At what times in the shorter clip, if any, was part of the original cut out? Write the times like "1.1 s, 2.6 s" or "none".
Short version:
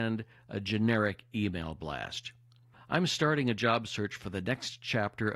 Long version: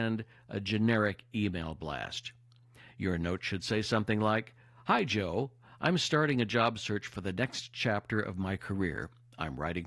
2.7 s